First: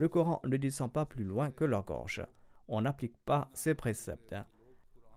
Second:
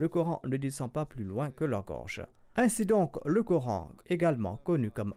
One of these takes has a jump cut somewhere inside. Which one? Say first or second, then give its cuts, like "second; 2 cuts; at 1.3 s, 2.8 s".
second; 1 cut; at 2.5 s